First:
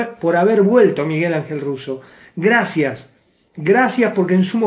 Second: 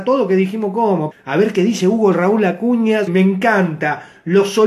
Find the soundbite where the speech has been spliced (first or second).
second